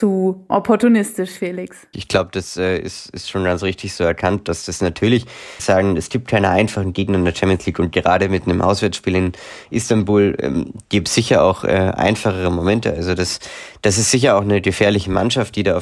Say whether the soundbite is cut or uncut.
cut